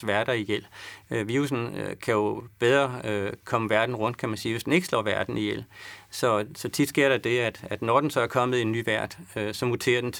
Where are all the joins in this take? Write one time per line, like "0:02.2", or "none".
none